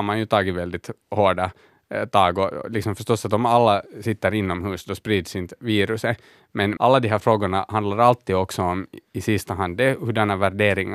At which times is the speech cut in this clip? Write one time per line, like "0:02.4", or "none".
none

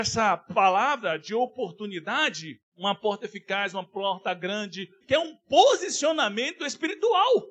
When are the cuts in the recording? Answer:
0:02.6
0:05.0

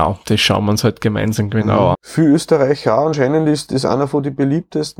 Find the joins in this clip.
0:01.9
0:03.7

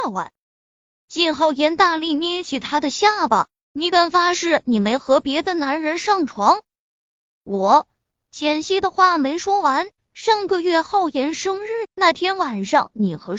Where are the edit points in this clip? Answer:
0:10.0
0:11.8

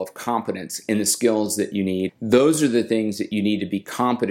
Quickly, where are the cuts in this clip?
0:02.1

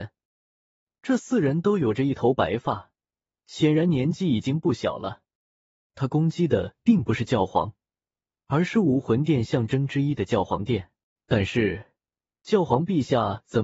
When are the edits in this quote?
0:05.9
0:11.1

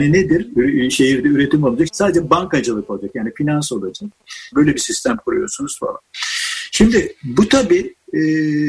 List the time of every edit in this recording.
0:01.9
0:04.5

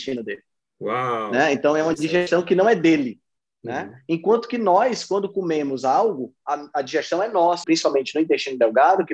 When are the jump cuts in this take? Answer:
0:07.6

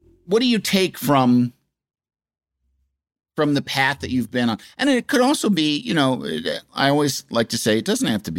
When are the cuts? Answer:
none

